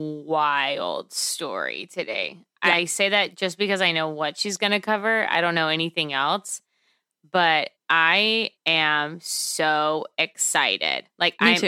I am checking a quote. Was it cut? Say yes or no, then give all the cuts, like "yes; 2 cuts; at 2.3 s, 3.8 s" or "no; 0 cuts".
no; 0 cuts